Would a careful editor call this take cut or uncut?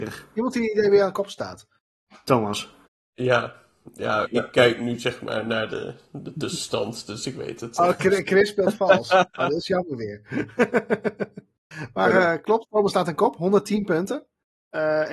cut